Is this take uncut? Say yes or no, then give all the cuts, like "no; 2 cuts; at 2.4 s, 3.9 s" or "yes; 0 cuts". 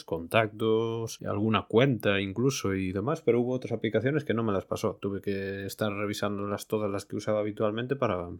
yes; 0 cuts